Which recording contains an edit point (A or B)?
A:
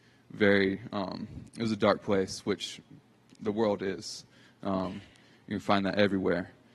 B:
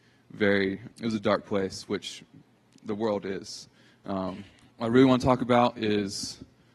B